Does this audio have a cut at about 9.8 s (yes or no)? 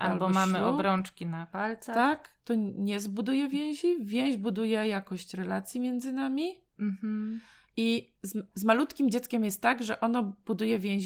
no